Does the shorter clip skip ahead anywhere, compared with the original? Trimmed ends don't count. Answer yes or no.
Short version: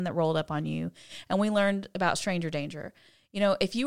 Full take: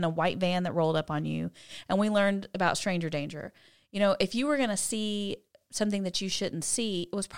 no